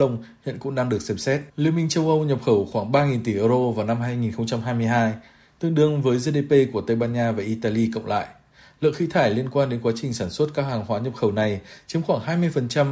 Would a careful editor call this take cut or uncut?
cut